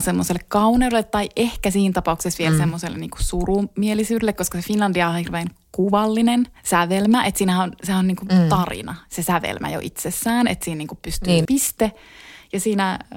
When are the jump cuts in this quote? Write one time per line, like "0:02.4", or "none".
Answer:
0:06.6
0:11.5